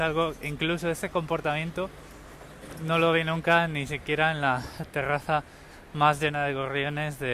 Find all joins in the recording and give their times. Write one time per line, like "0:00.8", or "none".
none